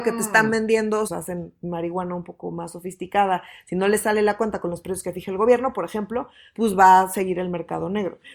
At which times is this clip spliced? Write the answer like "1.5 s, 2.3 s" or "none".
1.1 s